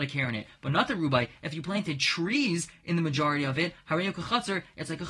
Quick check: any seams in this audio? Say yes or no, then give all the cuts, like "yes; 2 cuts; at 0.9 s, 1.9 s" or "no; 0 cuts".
no; 0 cuts